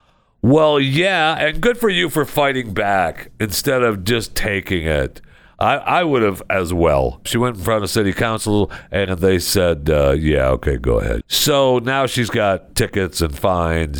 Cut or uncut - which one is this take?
cut